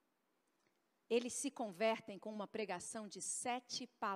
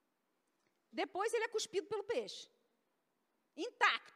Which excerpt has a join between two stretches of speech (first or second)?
second